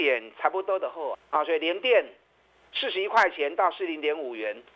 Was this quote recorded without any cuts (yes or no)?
no